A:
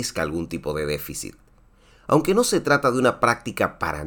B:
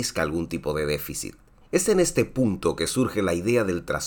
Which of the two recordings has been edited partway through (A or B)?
B